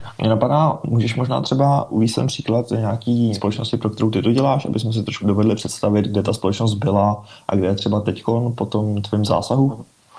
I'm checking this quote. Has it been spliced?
no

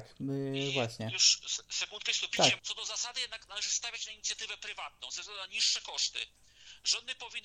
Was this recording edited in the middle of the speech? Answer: yes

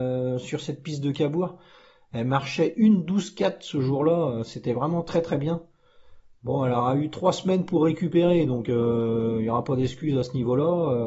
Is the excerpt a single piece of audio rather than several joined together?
yes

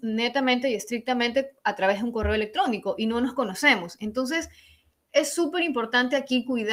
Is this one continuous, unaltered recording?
yes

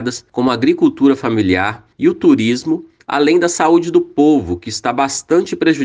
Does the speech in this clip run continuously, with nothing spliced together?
yes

